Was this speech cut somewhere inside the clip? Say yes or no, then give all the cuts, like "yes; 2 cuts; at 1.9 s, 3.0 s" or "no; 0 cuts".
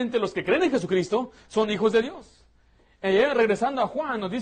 no; 0 cuts